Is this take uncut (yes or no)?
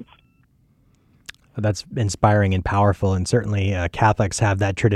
yes